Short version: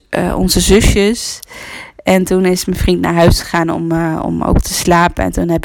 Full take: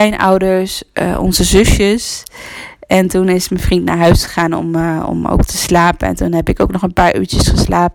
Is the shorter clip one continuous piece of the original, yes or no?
yes